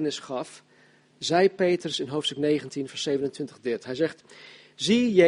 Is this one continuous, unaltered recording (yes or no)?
yes